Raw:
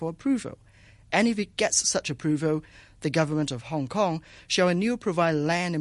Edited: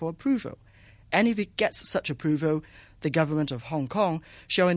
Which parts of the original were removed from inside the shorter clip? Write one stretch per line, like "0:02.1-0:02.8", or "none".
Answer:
none